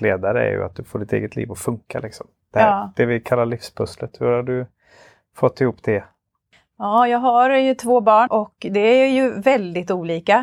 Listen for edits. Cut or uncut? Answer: cut